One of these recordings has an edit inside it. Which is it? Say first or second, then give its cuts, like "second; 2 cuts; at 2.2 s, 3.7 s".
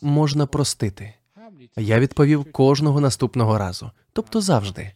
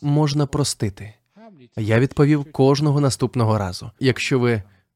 second; 1 cut; at 4.0 s